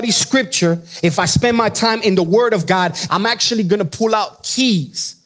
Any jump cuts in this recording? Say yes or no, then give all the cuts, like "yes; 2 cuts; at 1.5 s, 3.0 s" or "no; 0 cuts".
yes; 1 cut; at 3.1 s